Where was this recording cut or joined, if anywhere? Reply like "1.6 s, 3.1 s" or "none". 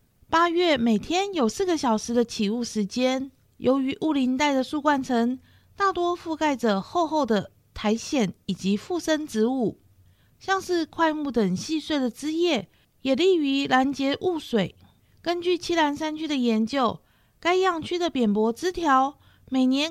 3.4 s